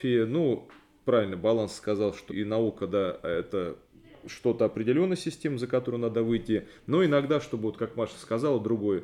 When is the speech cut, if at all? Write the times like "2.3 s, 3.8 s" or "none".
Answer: 2.3 s